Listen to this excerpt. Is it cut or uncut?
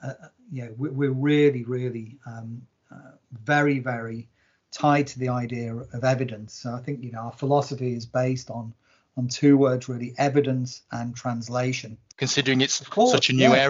cut